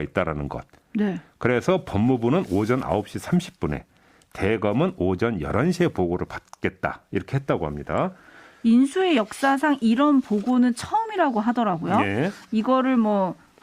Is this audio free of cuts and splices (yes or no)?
yes